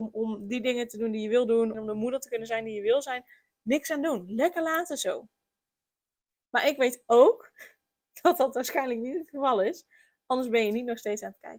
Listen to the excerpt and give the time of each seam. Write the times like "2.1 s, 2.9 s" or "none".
1.7 s

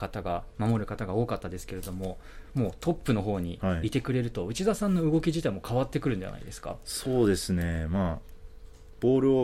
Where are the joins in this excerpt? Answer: none

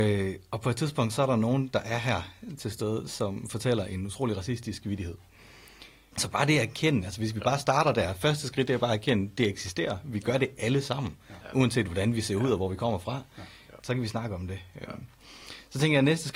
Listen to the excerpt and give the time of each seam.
6.1 s, 13.8 s

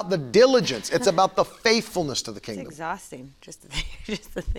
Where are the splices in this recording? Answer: none

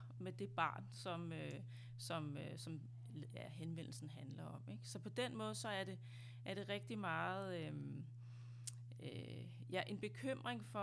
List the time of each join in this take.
none

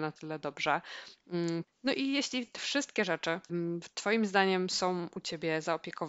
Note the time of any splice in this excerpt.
1.6 s, 3.5 s

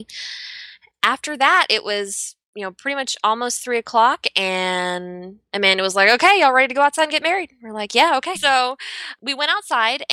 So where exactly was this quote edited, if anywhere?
8.4 s

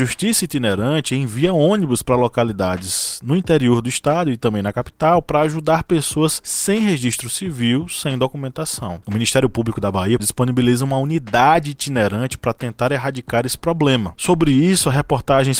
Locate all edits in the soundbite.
9.0 s, 10.2 s, 14.1 s

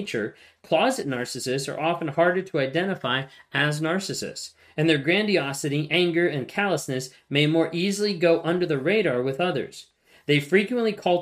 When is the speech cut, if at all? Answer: none

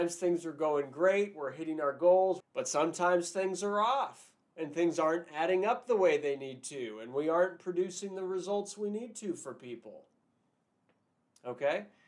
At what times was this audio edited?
2.4 s

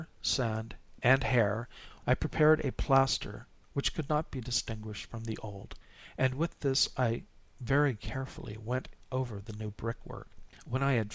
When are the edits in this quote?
2.0 s

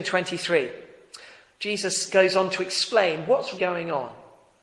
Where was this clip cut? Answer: 3.6 s

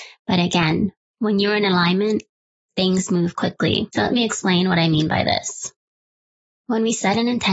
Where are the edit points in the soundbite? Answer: none

